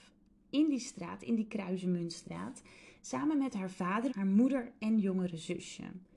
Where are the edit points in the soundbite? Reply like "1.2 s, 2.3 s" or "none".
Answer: 4.1 s